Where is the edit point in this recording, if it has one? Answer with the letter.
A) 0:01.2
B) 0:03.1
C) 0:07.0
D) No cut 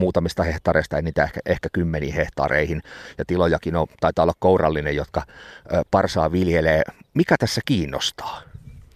D